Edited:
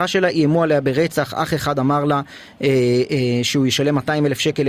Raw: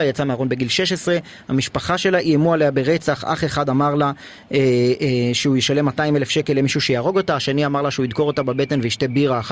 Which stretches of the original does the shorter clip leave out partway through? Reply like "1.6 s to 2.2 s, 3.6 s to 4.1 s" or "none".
none